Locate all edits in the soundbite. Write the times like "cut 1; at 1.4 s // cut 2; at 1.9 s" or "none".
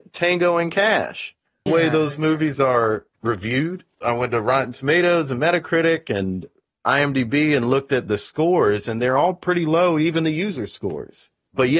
cut 1; at 1.7 s